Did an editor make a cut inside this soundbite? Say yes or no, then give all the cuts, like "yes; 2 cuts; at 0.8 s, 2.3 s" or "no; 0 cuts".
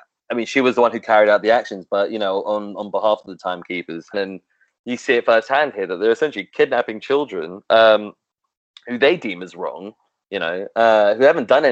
yes; 1 cut; at 4.1 s